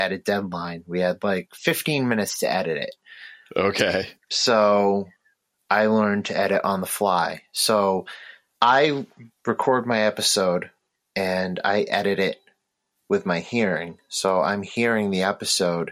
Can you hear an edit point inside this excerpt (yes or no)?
no